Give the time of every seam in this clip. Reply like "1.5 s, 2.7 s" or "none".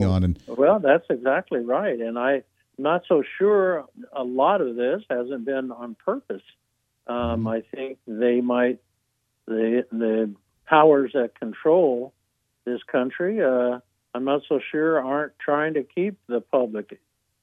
none

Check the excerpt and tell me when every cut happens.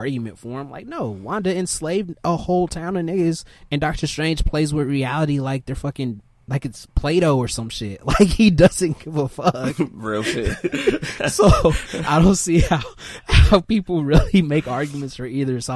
none

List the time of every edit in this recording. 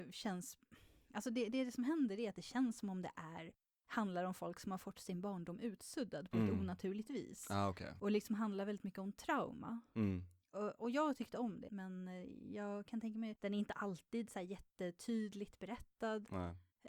11.7 s, 13.4 s

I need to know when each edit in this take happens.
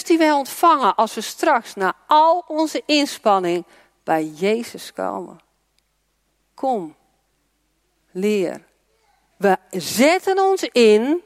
9.3 s

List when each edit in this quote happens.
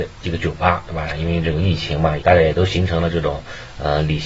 1.1 s, 2.2 s

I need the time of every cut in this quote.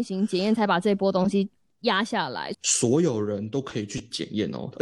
2.5 s

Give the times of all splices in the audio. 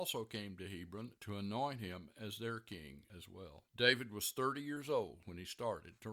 3.7 s

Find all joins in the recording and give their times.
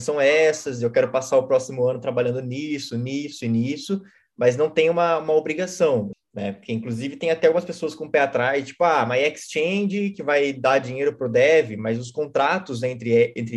6.1 s

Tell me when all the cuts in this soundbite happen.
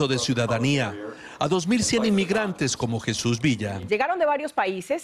3.9 s

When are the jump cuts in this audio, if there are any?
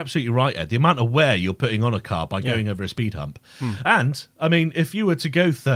none

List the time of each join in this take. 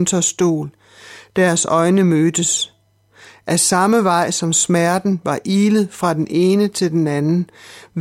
none

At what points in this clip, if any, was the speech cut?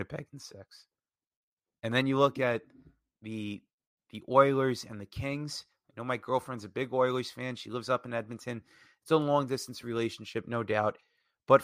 none

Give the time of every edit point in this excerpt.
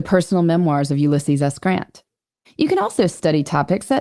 2.4 s

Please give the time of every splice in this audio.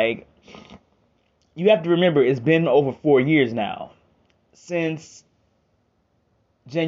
none

